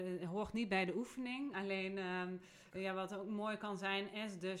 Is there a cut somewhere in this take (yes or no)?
no